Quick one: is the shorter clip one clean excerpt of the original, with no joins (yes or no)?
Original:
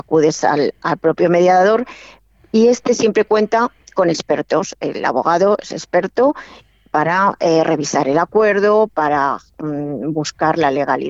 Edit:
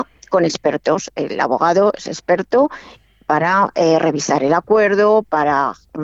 yes